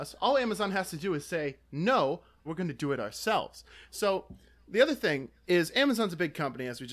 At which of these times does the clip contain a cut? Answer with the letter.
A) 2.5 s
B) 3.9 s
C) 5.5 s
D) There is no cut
A